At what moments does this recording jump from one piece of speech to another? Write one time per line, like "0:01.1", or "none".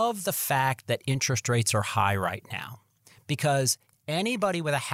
none